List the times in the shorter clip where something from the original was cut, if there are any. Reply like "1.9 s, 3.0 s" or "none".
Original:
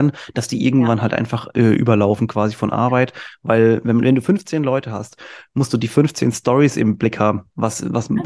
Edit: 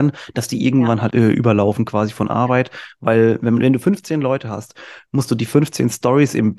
1.1 s